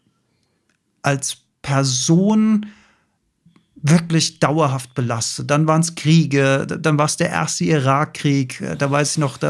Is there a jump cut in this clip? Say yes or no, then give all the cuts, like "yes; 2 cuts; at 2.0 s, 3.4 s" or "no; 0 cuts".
no; 0 cuts